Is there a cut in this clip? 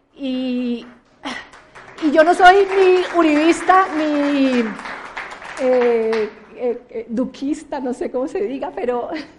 no; 0 cuts

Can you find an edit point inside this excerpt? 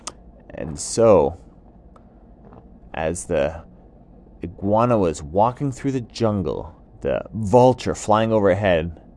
yes; 1 cut; at 6.9 s

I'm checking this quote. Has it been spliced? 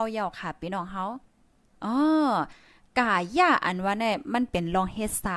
no; 0 cuts

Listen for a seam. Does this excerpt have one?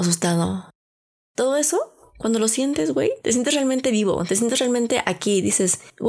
no; 0 cuts

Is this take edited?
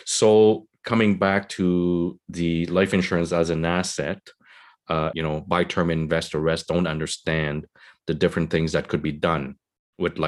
yes; 1 cut; at 5.1 s

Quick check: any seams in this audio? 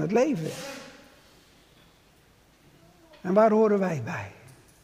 no; 0 cuts

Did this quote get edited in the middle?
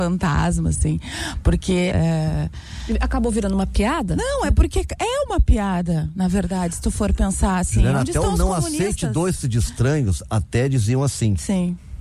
yes; 1 cut; at 1.9 s

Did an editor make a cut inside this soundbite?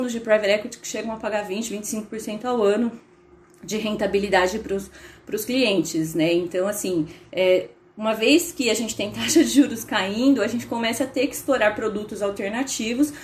no; 0 cuts

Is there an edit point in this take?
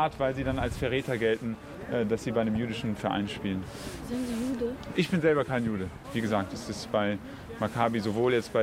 no; 0 cuts

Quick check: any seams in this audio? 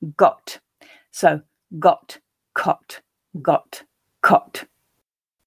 no; 0 cuts

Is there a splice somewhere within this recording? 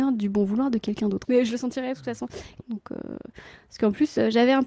yes; 2 cuts; at 1.2 s, 2.6 s

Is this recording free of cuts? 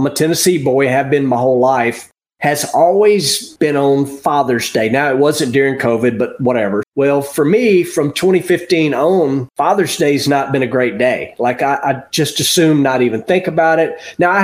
no; 1 cut; at 6.8 s

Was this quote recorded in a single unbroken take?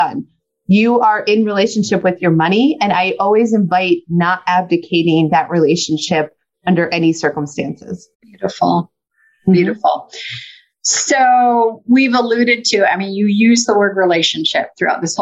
no; 1 cut; at 8.1 s

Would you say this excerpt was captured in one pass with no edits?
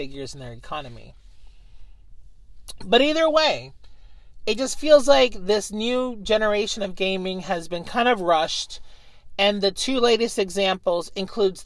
yes; 0 cuts

